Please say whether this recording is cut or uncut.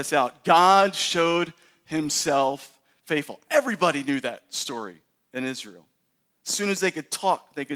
uncut